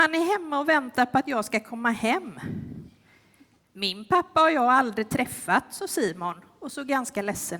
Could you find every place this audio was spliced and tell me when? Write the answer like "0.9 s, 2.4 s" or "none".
3.6 s